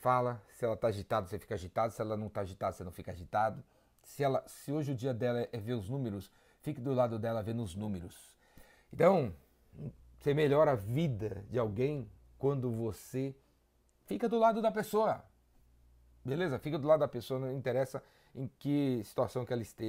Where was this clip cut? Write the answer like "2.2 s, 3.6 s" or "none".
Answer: none